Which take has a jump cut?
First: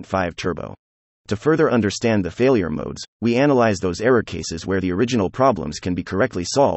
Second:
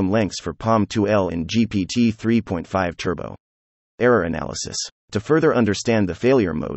first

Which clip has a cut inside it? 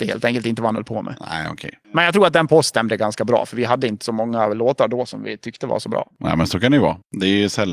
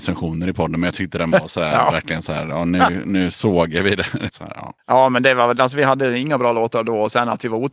second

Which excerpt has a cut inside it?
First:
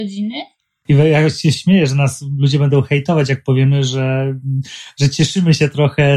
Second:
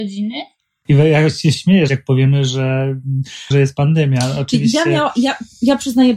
second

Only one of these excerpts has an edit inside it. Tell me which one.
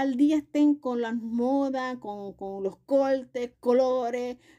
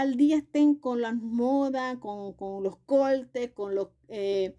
first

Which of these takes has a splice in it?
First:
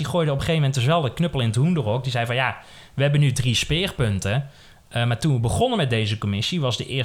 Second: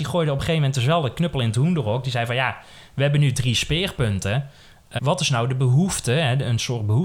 second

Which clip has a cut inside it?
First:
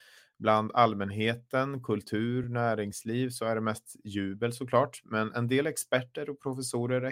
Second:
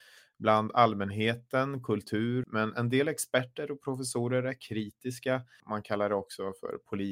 second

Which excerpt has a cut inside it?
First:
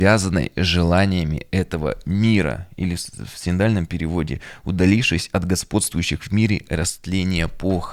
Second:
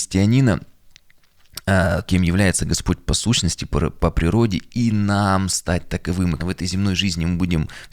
second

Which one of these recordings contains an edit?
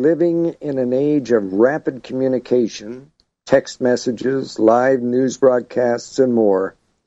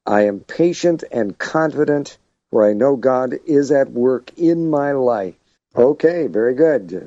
second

